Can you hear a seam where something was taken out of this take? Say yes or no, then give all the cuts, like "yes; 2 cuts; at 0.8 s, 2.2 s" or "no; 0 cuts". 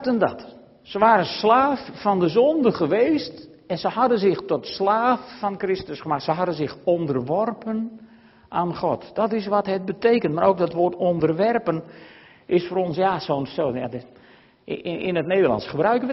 no; 0 cuts